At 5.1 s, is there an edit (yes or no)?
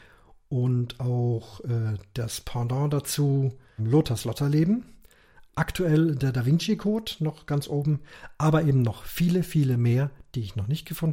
no